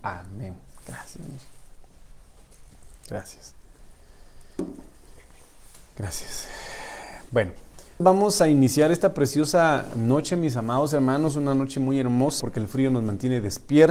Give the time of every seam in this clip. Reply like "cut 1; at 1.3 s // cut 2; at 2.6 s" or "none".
cut 1; at 8.0 s // cut 2; at 12.4 s